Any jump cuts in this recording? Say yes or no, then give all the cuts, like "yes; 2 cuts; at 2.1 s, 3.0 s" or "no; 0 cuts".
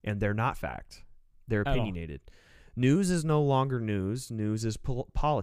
no; 0 cuts